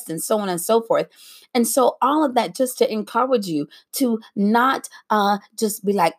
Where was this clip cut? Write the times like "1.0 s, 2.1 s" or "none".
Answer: none